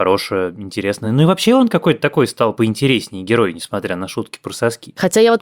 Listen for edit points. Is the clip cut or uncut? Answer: uncut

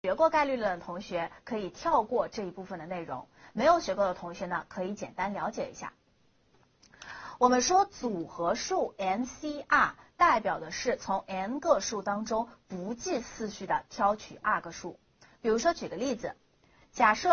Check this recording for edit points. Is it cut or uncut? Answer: uncut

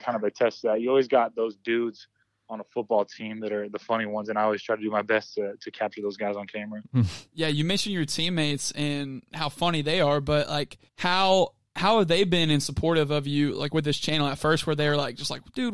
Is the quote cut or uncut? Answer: cut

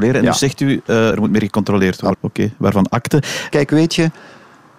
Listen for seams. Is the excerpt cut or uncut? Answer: cut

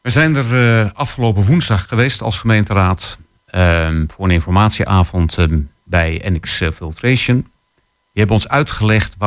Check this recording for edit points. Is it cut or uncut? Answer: cut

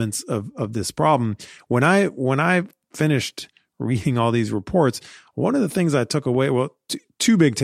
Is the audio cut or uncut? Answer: uncut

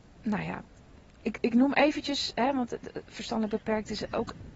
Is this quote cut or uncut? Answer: uncut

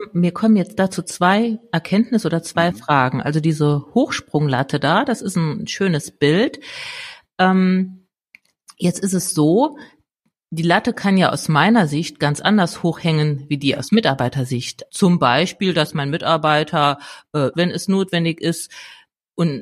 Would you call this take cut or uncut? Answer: cut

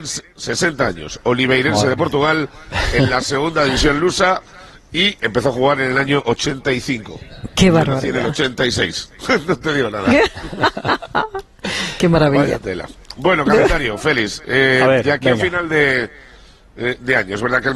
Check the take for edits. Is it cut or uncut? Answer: cut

